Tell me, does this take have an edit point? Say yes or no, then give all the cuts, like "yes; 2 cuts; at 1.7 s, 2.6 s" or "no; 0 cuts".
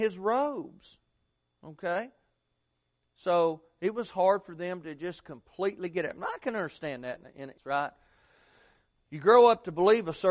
yes; 1 cut; at 7.6 s